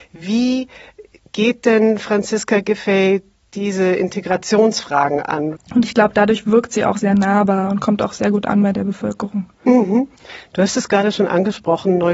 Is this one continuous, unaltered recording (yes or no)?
no